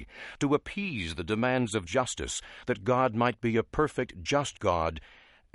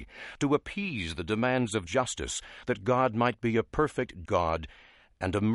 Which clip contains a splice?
second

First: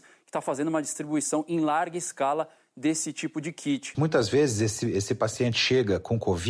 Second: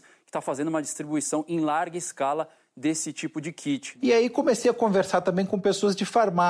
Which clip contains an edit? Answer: first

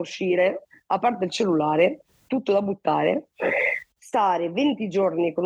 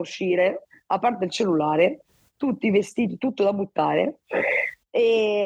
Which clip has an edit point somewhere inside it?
first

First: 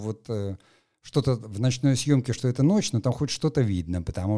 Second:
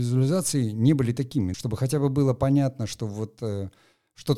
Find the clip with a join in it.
second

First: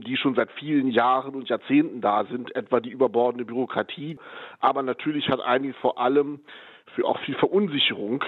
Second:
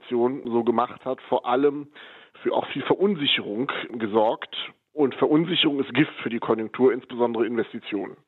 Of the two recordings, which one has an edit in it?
first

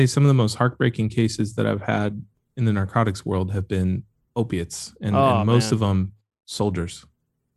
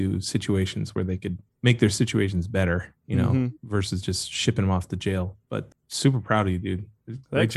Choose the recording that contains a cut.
second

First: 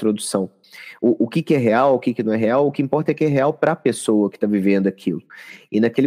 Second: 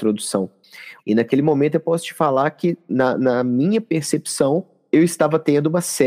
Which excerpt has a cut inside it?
second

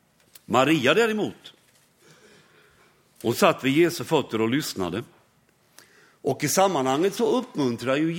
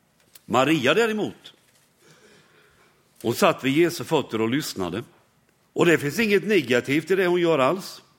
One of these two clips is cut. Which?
second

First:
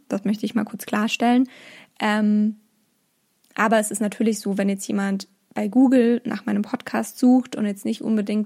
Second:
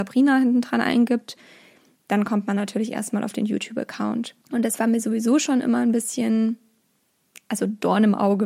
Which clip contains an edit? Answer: second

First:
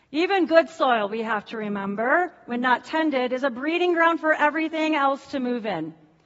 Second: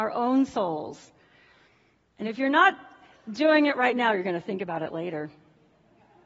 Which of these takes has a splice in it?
second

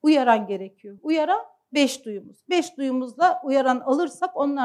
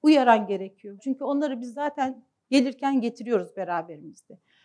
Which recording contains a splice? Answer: second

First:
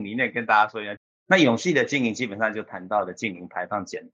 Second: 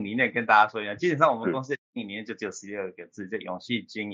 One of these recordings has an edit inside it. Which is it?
first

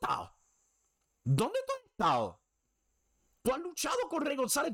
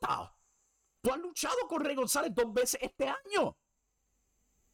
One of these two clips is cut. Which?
second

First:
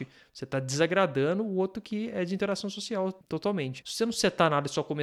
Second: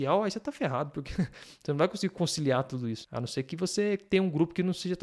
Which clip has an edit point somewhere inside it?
first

